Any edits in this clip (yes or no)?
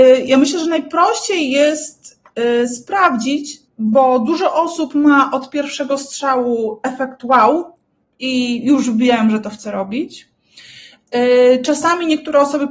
yes